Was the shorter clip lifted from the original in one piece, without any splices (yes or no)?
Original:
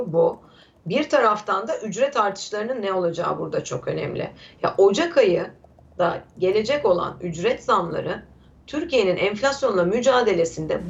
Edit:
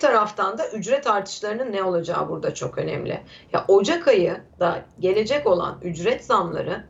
no